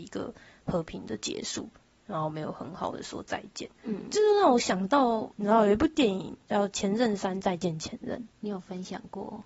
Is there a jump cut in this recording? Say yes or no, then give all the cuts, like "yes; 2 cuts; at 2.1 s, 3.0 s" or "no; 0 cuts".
no; 0 cuts